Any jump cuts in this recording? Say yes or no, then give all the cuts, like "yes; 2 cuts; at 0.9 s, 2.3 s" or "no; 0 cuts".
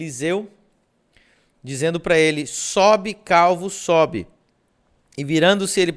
no; 0 cuts